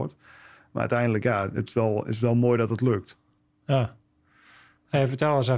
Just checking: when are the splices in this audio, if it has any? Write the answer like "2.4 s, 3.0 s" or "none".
none